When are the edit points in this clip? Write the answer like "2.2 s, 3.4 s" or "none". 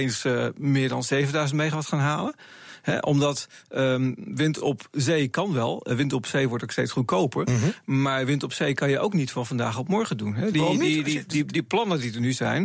none